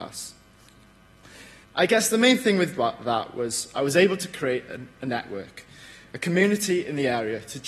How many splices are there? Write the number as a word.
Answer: one